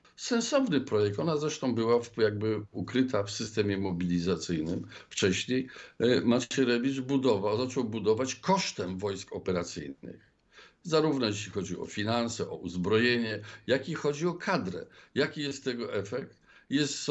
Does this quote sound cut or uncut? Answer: uncut